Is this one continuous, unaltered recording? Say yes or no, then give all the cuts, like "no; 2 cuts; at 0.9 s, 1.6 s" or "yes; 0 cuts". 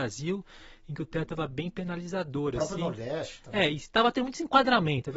yes; 0 cuts